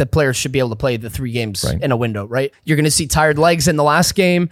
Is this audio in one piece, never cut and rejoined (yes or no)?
no